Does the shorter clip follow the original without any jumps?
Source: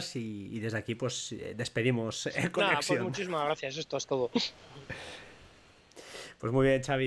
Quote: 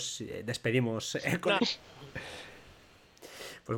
no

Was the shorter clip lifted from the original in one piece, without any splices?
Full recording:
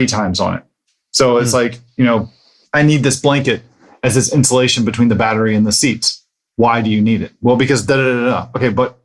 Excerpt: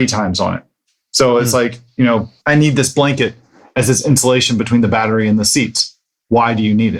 no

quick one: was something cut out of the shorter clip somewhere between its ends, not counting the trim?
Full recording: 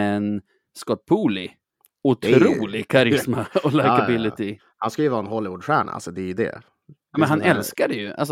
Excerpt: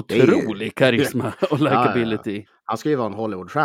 no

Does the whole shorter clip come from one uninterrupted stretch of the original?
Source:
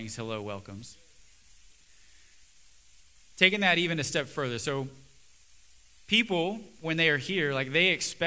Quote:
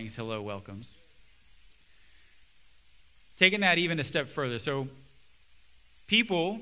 yes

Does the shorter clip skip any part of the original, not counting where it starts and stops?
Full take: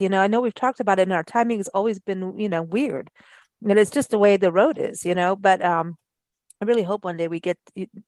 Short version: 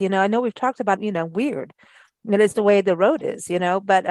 yes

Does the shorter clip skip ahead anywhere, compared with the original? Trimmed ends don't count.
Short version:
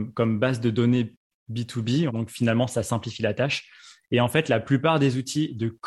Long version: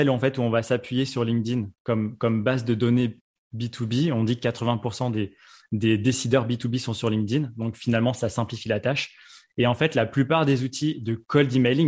yes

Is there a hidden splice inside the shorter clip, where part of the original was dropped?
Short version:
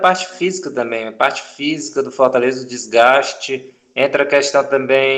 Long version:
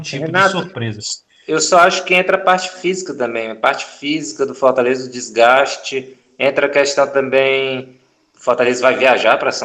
no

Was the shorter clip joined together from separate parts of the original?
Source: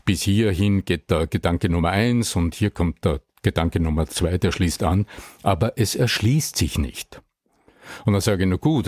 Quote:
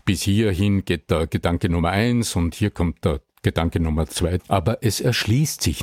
yes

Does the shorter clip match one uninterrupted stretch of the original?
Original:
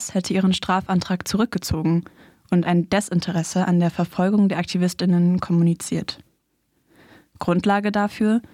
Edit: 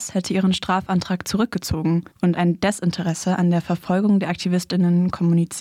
no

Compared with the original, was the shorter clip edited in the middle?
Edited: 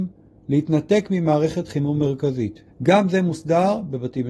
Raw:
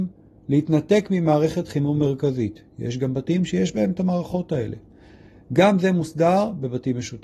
yes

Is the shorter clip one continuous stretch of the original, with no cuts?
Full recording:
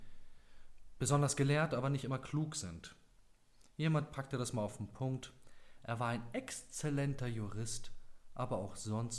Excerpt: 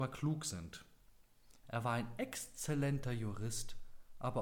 no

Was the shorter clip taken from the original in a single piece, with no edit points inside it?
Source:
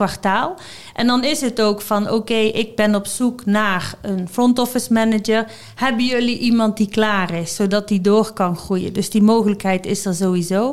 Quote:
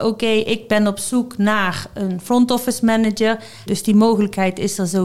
no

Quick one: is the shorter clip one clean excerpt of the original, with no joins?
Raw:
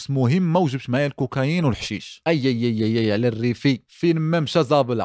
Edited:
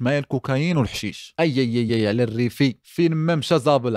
no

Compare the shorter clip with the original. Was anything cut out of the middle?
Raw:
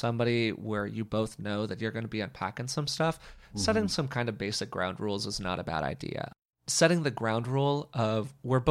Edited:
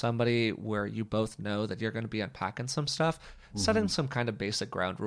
no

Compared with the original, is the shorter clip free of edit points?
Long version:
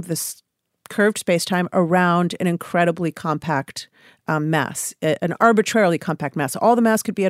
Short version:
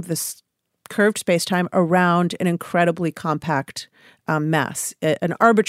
yes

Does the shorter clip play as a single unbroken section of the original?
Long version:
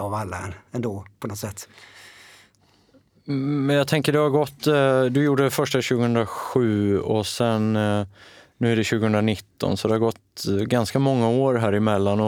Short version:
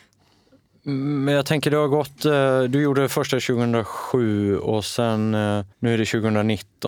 no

